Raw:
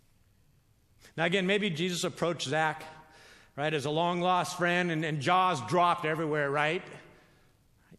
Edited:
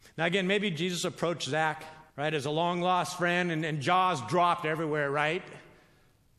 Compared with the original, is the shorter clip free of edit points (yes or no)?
no